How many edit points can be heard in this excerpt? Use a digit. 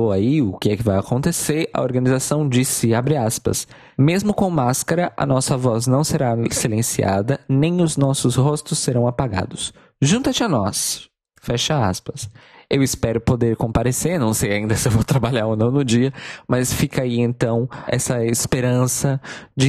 0